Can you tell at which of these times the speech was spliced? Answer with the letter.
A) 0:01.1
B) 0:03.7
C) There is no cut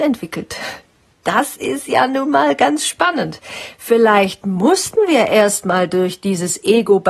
A